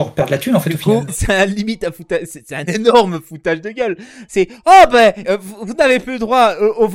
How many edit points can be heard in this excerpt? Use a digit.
2